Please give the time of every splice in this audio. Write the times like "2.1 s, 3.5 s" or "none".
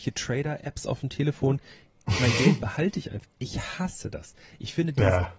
3.2 s